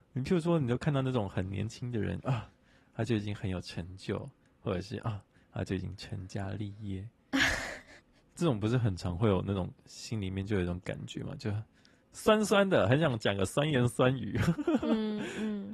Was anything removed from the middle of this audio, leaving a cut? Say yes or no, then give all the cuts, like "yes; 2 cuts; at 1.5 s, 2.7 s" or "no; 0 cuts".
no; 0 cuts